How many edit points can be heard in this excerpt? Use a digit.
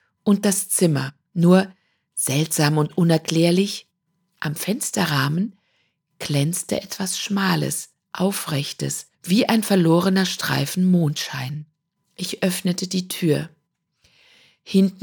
2